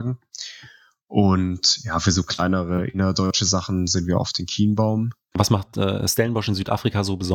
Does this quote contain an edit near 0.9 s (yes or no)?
no